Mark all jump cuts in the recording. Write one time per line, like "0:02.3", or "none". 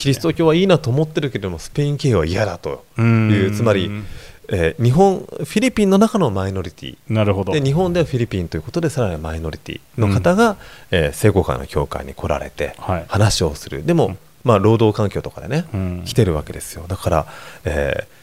none